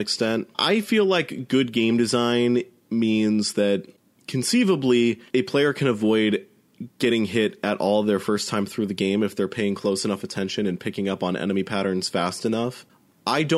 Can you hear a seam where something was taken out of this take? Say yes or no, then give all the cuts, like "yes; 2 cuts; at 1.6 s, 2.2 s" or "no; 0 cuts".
yes; 1 cut; at 5.3 s